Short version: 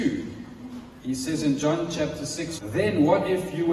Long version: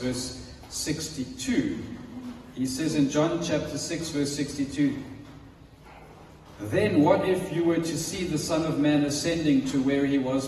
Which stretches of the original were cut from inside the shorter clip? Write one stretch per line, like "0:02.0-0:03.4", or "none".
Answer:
0:04.1-0:06.6